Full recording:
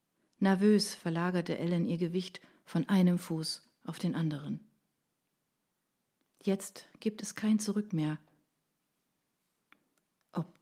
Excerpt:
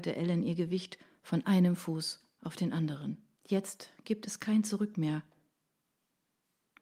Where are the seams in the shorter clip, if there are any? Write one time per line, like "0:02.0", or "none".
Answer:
0:03.3